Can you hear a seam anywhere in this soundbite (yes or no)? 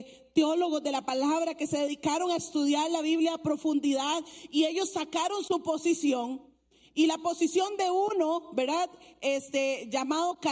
no